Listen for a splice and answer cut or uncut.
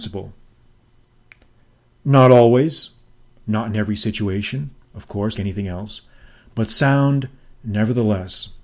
cut